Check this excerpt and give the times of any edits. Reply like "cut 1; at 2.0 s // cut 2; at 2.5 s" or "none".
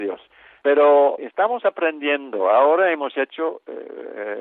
cut 1; at 1.2 s